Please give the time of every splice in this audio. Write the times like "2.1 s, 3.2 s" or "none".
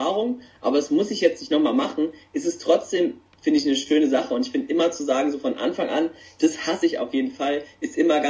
none